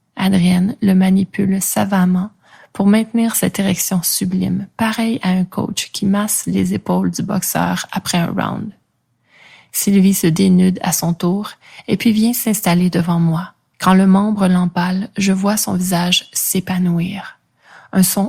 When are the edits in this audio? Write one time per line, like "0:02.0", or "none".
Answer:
0:13.7